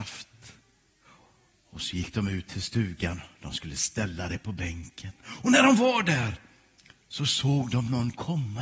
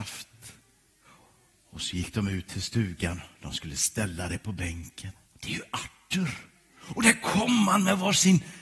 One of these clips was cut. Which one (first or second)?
second